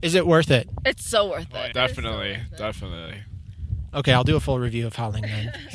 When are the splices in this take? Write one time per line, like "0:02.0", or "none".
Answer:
0:01.7